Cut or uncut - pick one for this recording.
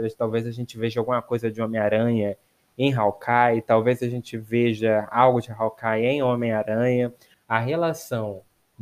cut